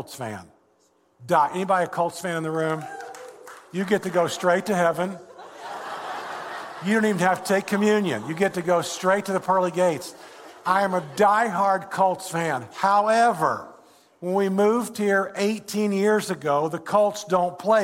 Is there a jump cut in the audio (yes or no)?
no